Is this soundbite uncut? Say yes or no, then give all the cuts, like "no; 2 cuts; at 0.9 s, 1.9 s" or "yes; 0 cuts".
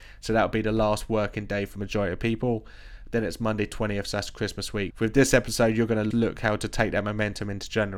no; 2 cuts; at 4.9 s, 6.1 s